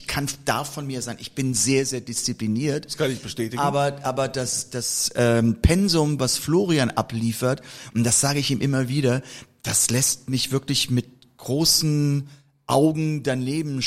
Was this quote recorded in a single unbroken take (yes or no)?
yes